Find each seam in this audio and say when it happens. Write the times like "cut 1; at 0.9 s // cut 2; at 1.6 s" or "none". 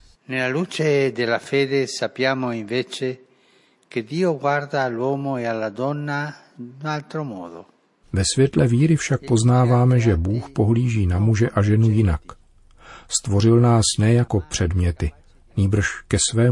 none